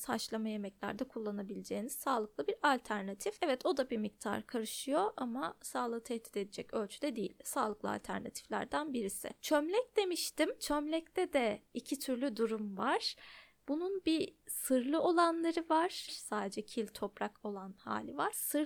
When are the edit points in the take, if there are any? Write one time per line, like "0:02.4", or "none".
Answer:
0:16.1